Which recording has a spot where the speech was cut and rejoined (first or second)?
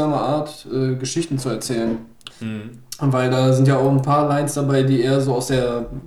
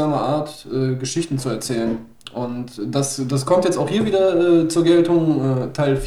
first